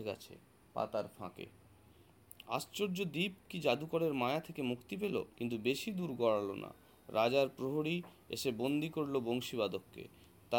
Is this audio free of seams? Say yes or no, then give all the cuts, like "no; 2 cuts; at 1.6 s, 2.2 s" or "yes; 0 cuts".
no; 1 cut; at 5.3 s